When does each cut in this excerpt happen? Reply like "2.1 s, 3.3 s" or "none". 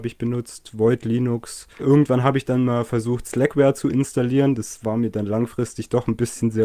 1.8 s

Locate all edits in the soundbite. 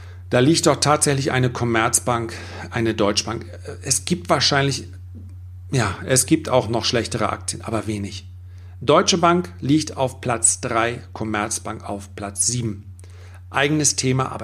none

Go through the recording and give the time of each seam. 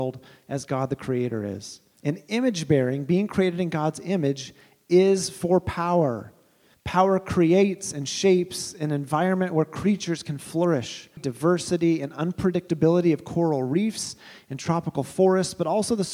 2.0 s, 6.7 s, 11.2 s

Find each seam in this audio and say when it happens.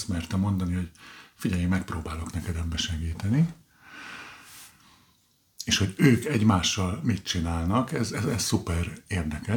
none

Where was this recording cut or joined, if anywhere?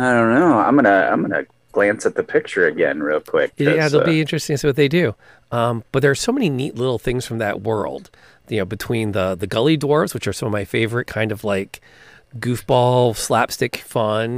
none

